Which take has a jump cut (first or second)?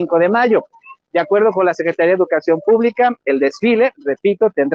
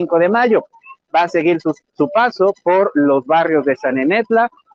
second